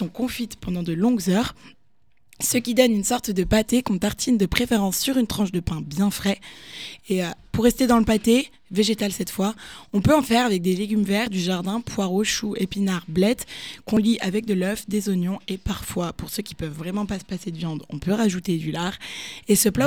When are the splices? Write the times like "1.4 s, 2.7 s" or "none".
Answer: none